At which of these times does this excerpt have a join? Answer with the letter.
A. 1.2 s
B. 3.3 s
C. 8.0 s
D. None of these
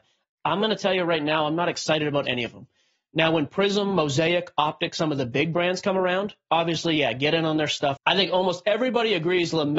C